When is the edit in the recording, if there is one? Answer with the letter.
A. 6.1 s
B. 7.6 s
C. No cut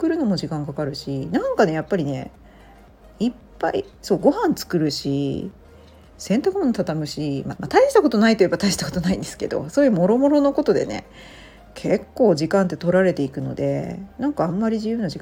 B